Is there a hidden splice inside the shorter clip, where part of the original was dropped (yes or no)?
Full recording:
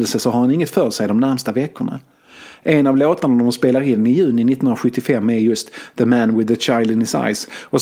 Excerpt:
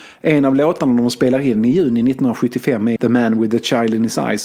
yes